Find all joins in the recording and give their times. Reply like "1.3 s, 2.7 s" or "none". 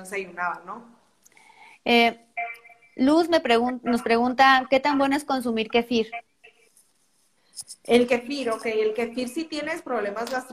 none